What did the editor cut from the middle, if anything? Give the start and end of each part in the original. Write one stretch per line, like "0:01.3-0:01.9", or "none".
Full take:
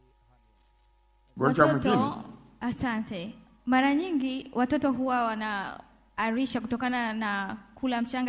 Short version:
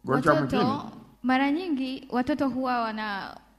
0:02.5-0:03.6